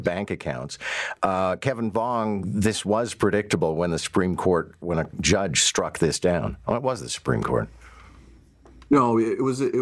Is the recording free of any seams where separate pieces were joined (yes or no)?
no